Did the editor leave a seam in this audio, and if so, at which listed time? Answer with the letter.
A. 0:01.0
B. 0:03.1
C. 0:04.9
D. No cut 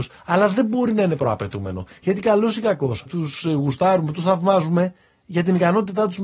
B